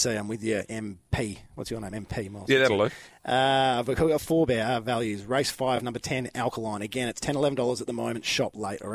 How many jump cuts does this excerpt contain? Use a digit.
0